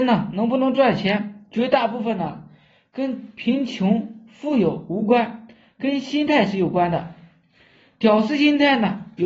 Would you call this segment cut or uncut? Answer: uncut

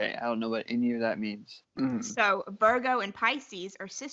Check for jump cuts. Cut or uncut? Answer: cut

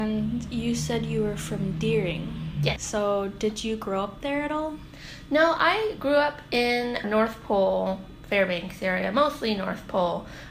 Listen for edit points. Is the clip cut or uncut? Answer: cut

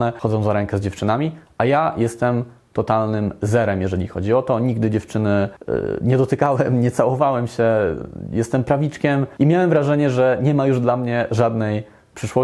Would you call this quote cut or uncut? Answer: uncut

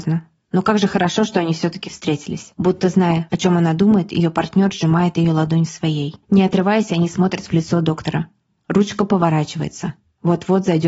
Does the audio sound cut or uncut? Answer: cut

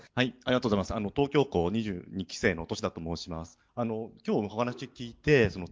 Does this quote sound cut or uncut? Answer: cut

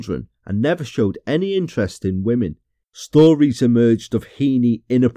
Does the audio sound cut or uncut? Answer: cut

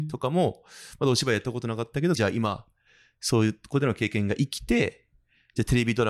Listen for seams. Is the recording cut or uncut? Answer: cut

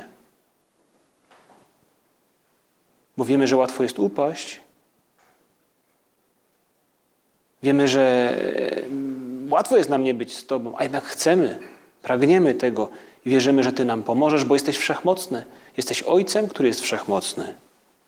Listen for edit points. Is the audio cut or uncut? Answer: uncut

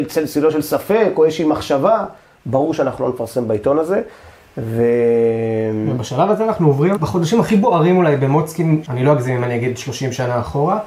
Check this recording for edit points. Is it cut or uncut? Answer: cut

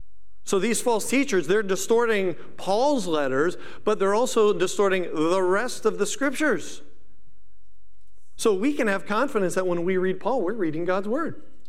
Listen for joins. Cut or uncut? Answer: cut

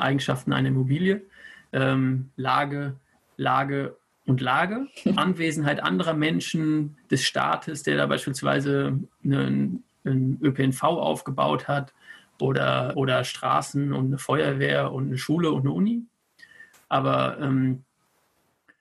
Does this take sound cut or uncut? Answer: cut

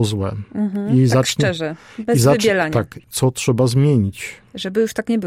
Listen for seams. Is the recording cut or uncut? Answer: cut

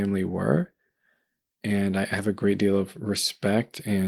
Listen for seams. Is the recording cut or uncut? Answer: uncut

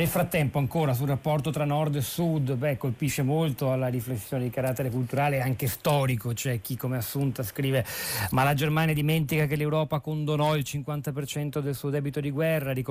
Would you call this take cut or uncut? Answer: uncut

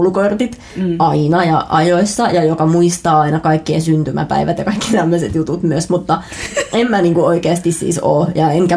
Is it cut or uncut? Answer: uncut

